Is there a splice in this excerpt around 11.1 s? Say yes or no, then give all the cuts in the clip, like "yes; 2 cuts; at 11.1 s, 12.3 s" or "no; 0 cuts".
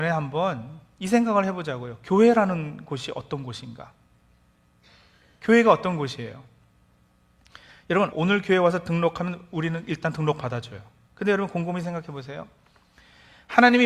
yes; 2 cuts; at 8.1 s, 11.1 s